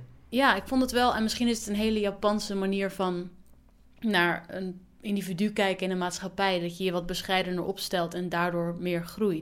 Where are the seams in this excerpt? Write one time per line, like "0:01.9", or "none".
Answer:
none